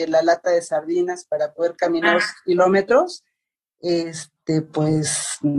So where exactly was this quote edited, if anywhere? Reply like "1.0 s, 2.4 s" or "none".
none